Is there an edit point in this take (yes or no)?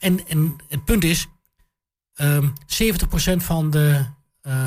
no